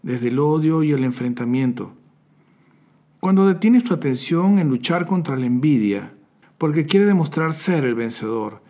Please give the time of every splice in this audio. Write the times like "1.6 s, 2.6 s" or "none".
6.4 s